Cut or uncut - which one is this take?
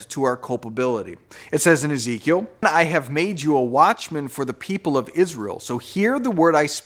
cut